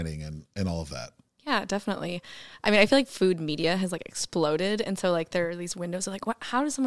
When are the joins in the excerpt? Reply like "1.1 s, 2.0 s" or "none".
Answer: none

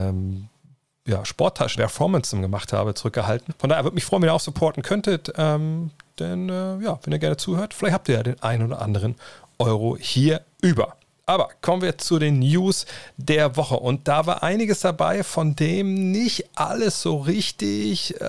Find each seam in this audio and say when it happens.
1.8 s, 3.5 s

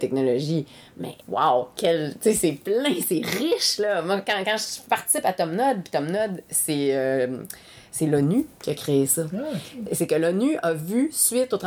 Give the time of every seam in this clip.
1.2 s

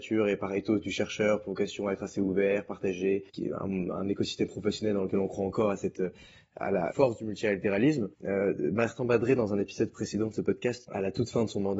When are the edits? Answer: 3.3 s, 8.1 s, 10.9 s

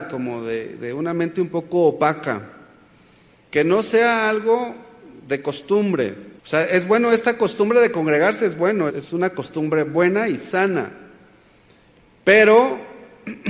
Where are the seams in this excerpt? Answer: 3.4 s, 6.4 s, 8.9 s

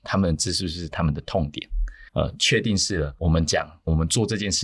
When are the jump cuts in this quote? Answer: 2.1 s

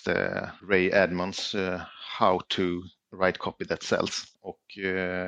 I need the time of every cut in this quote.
4.3 s

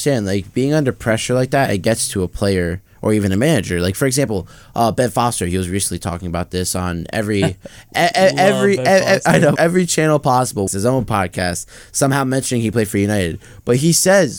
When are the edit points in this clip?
9.5 s, 10.7 s

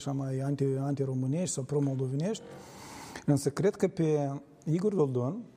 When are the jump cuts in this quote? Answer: none

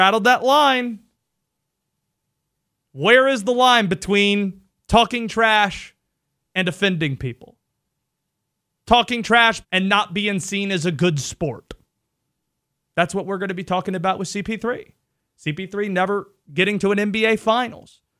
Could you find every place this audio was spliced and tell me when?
9.6 s, 12.8 s

